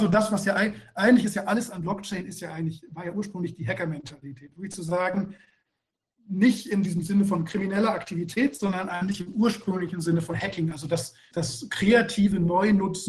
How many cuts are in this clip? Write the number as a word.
one